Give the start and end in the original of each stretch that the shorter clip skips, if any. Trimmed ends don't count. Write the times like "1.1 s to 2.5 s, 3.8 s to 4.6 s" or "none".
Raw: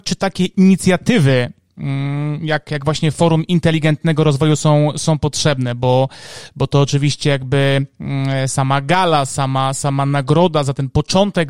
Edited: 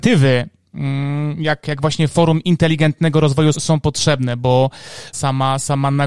4.6 s to 4.9 s, 6.5 s to 9.3 s